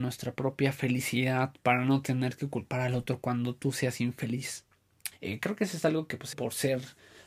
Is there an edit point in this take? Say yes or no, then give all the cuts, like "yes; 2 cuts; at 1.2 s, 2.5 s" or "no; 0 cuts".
yes; 2 cuts; at 5.1 s, 6.3 s